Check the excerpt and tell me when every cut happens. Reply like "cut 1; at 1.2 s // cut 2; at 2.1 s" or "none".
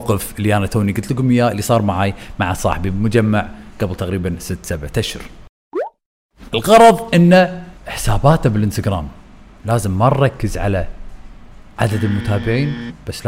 cut 1; at 7.8 s